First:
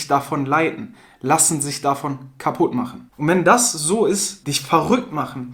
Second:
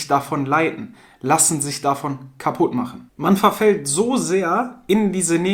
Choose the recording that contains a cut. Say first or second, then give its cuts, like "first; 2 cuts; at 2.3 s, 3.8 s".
first; 2 cuts; at 3.1 s, 4.4 s